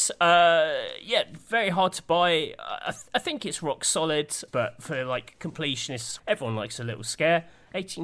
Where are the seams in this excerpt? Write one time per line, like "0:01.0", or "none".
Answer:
0:04.5
0:06.2